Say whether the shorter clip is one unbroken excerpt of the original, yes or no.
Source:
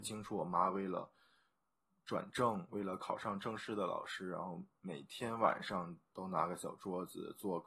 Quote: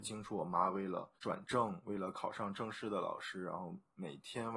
no